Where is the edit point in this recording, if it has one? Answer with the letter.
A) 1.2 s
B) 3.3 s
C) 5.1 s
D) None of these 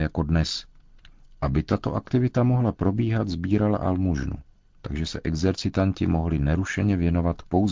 A